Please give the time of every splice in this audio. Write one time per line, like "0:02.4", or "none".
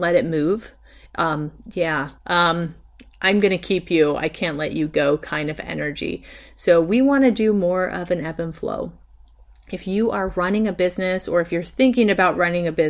0:02.2